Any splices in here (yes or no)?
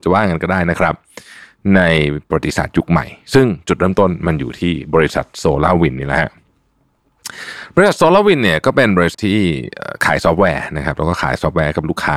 yes